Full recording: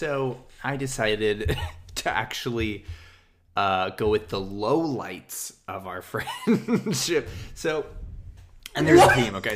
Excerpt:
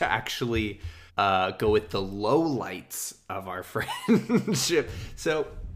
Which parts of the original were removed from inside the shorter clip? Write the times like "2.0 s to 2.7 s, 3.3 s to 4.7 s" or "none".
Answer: 3.1 s to 3.5 s